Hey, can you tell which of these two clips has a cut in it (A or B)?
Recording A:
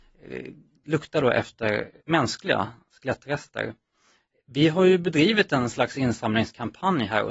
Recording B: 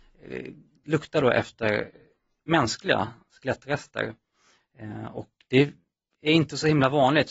A